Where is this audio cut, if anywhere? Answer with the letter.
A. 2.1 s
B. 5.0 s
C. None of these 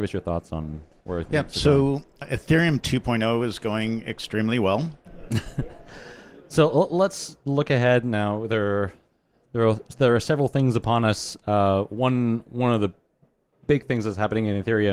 B